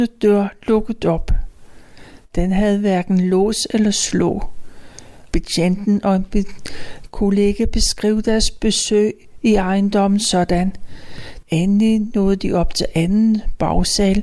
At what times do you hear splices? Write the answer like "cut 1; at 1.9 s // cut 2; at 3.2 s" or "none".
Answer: cut 1; at 5.3 s // cut 2; at 11.4 s